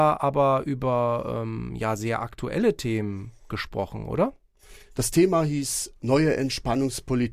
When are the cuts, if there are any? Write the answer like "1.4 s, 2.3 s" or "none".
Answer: 4.9 s